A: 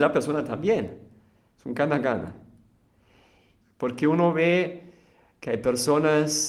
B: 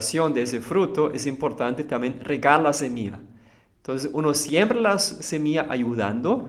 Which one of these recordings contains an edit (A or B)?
A